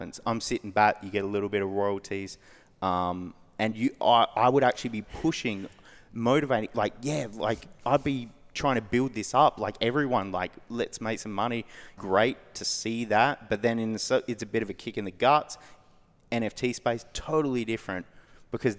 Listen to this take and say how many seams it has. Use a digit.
1